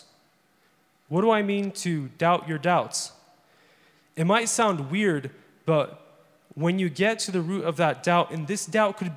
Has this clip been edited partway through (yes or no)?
no